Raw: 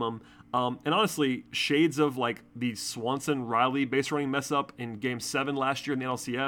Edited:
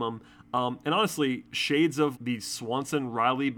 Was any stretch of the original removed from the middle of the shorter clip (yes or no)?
yes